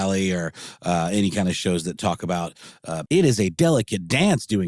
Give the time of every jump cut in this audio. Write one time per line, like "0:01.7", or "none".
0:03.1